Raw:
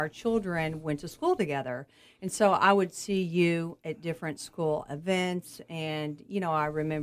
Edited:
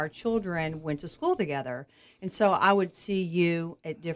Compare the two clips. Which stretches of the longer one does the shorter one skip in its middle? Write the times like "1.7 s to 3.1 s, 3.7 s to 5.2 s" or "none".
none